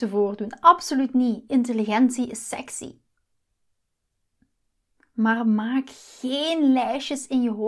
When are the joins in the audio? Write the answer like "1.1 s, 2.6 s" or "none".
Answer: none